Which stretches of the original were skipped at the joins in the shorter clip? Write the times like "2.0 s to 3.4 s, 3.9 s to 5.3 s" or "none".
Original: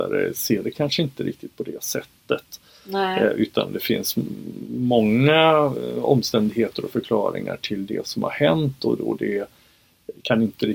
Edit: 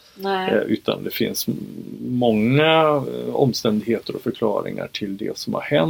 none